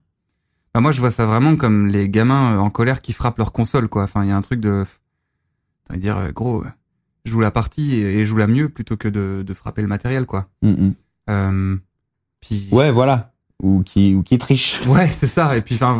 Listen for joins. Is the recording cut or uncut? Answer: uncut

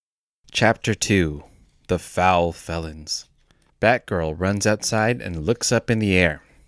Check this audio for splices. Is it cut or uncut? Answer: uncut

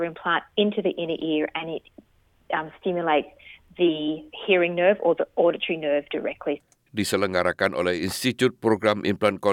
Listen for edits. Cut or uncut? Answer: uncut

